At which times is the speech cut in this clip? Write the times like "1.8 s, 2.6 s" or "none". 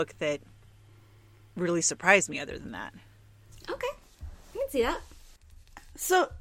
none